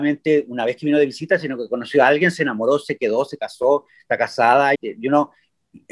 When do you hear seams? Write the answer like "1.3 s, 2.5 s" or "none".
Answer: 4.7 s